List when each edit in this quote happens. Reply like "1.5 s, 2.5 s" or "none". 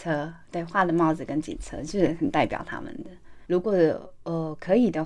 3.5 s